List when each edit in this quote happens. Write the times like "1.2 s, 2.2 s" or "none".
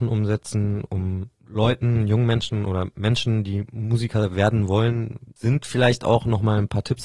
none

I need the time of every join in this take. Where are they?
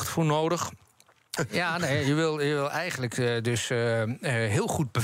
1.4 s

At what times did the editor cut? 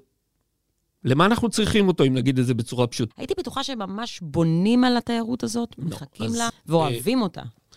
3.1 s, 6.5 s

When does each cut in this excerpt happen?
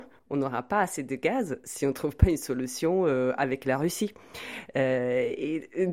none

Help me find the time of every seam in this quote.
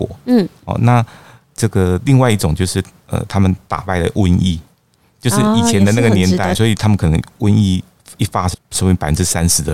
6.5 s, 8.5 s

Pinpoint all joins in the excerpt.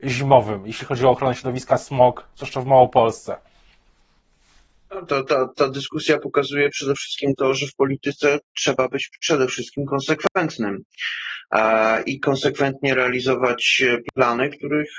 none

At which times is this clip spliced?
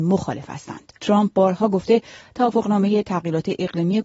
1.0 s

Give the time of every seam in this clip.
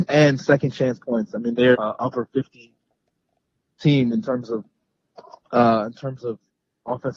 1.7 s, 5.4 s

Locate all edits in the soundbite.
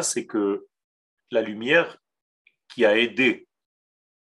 1.2 s

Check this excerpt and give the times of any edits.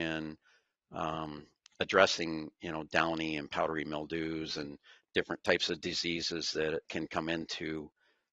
6.8 s

